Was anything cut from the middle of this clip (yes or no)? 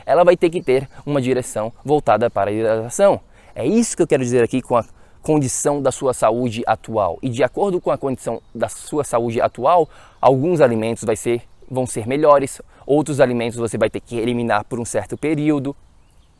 no